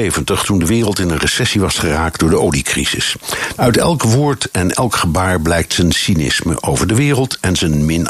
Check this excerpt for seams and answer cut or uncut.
cut